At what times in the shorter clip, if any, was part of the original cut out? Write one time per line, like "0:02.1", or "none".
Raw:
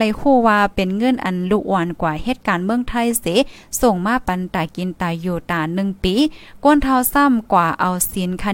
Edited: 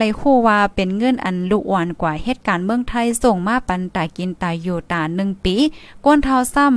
0:03.2